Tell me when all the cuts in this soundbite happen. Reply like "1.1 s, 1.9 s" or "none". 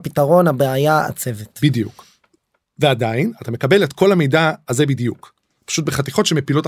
none

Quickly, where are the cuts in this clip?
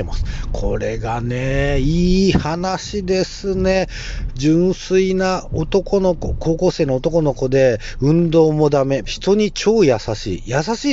4.3 s, 9.0 s

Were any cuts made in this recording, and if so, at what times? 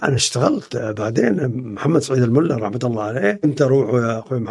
none

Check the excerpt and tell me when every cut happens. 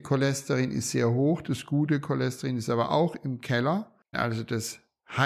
4.1 s

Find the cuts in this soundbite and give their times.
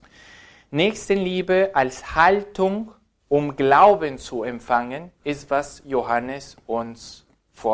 none

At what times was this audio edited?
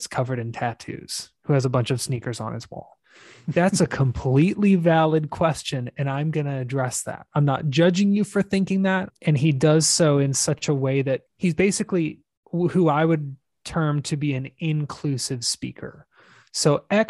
9.1 s, 11.3 s

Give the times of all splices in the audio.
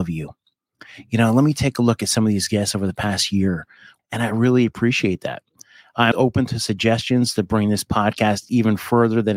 4.0 s, 6.1 s

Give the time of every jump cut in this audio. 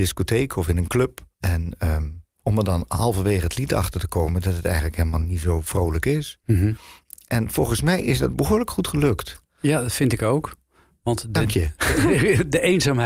1.3 s

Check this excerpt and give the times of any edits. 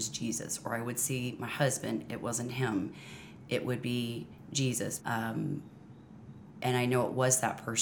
5.0 s

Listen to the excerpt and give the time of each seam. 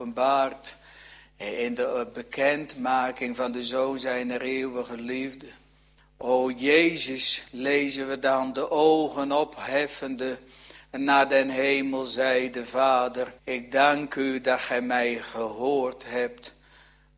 6.0 s, 13.4 s

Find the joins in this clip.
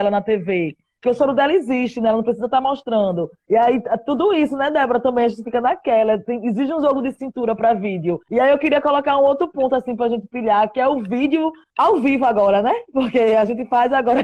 none

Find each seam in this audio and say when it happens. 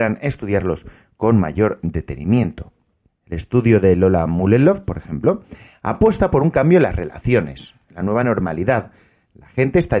none

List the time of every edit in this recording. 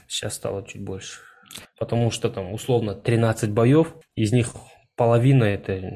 1.6 s, 4.0 s

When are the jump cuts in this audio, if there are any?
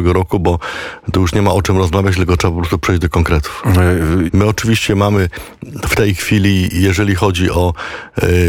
4.3 s

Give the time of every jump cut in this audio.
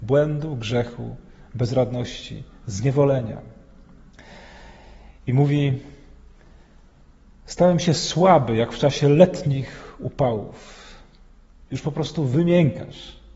none

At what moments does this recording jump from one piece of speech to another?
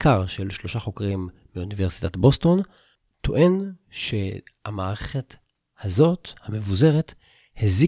none

